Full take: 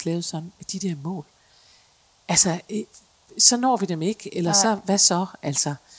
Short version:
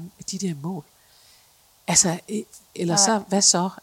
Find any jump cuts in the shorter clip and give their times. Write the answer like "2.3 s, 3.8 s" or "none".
2.7 s